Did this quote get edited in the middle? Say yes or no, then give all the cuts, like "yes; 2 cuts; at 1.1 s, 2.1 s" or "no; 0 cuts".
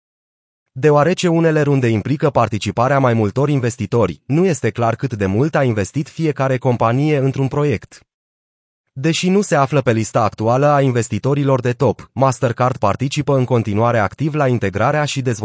no; 0 cuts